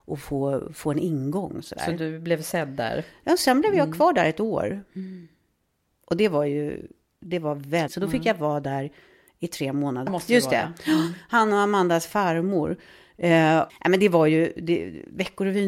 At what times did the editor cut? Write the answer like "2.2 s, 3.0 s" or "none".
7.9 s, 10.1 s, 13.7 s

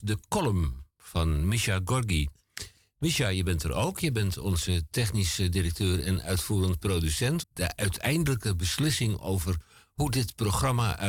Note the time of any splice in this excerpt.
7.4 s

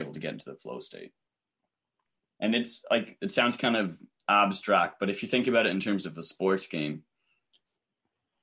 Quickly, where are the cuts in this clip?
none

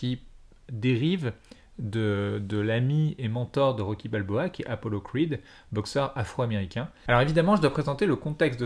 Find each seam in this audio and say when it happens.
7.1 s

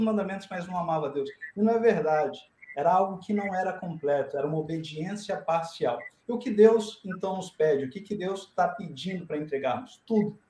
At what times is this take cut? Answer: none

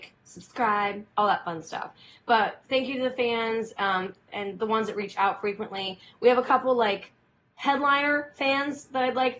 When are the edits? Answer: 4.3 s

